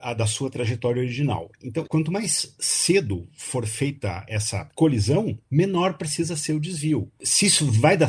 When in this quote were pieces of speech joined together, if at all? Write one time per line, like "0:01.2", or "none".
0:01.9